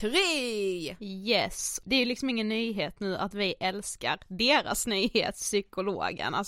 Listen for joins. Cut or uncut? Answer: uncut